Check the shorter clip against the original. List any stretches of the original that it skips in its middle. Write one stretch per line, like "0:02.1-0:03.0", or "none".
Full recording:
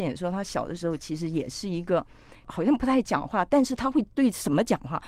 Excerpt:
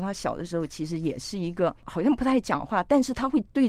0:02.1-0:02.4